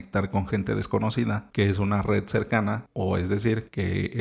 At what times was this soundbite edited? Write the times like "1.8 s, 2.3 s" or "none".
1.5 s